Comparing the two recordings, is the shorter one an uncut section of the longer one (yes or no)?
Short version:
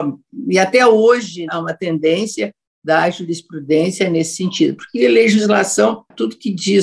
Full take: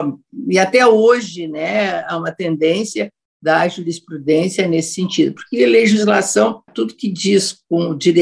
no